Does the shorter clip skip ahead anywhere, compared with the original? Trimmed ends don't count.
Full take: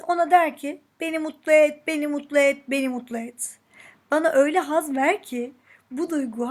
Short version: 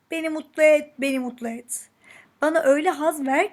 yes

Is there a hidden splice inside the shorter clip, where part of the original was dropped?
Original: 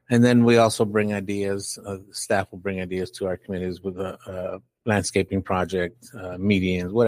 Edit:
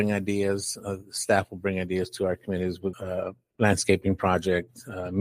yes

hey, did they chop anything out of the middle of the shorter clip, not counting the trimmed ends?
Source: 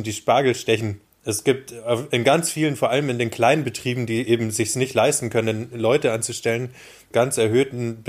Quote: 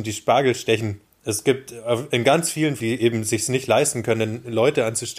yes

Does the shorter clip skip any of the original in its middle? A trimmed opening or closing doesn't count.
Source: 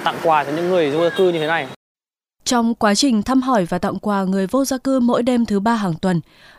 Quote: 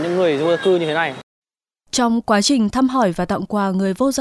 no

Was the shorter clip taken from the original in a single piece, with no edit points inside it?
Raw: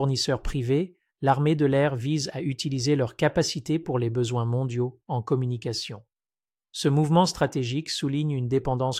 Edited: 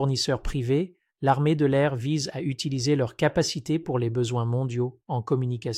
yes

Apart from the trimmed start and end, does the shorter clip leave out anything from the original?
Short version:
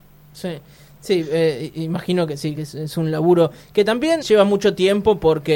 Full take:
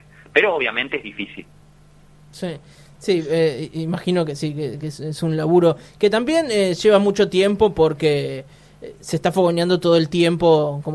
yes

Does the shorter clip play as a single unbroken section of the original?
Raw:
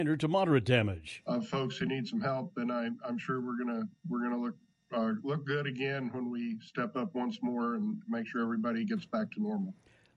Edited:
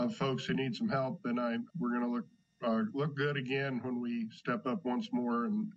no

